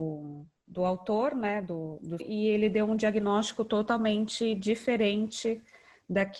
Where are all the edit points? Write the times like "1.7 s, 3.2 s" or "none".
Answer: 2.2 s